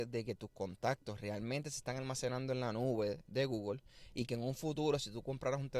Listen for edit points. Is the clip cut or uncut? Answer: uncut